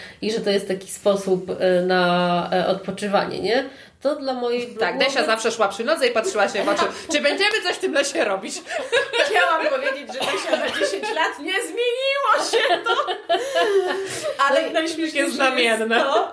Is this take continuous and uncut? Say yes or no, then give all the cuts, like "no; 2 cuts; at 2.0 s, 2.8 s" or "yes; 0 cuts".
yes; 0 cuts